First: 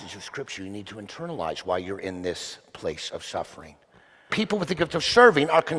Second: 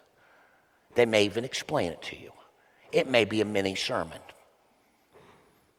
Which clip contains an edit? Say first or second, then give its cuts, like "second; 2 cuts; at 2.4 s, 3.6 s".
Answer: first; 1 cut; at 4.3 s